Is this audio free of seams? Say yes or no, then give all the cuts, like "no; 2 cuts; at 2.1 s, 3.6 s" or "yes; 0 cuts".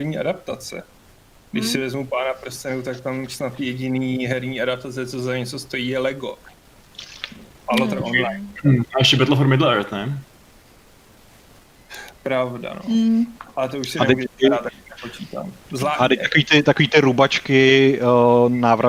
yes; 0 cuts